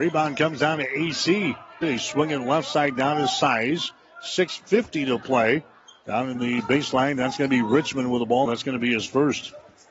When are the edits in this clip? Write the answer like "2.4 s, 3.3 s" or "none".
1.8 s, 8.5 s